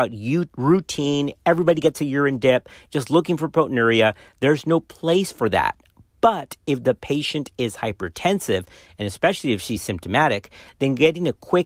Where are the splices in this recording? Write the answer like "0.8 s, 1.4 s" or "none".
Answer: none